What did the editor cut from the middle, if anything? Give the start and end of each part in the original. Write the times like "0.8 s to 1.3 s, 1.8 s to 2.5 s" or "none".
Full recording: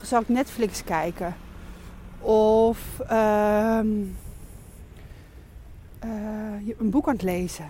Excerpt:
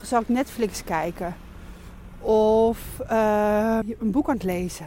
3.8 s to 6.6 s